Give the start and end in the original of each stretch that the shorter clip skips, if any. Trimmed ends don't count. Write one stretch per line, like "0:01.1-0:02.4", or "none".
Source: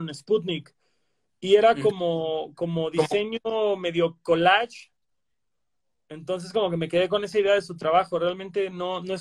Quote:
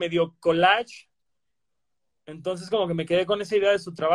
none